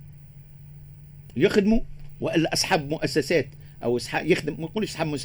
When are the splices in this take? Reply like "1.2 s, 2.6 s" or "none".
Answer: 1.3 s